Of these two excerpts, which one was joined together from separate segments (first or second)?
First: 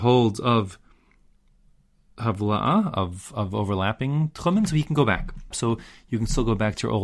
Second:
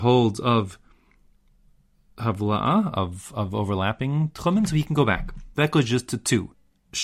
first